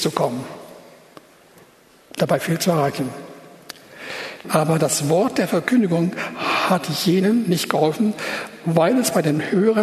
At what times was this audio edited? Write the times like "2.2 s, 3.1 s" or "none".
4.4 s